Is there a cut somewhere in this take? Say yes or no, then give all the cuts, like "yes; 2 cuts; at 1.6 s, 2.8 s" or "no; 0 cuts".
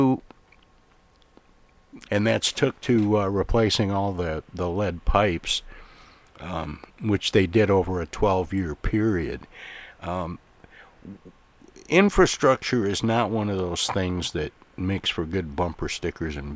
yes; 1 cut; at 2.1 s